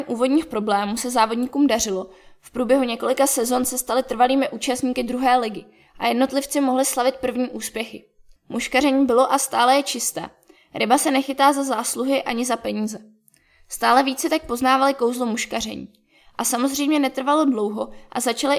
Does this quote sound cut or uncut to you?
cut